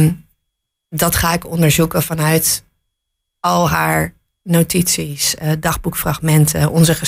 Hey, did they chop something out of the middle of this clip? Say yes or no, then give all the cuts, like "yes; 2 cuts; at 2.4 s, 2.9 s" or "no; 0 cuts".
no; 0 cuts